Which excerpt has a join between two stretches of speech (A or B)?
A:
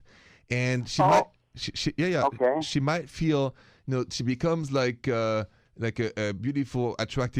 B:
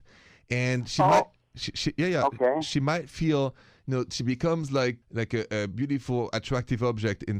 B